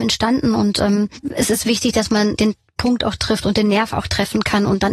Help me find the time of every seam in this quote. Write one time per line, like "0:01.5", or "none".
0:02.4